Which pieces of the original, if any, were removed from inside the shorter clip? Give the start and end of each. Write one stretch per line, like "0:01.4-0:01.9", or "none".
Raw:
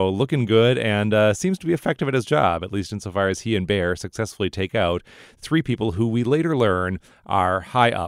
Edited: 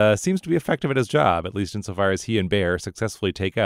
none